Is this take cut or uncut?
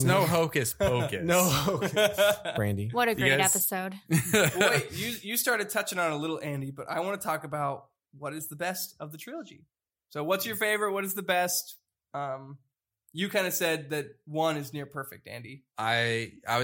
uncut